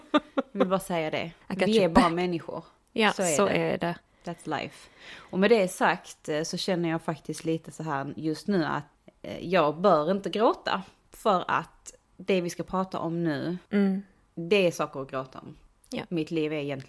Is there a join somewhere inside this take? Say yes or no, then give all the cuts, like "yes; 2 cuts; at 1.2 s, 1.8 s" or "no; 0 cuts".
no; 0 cuts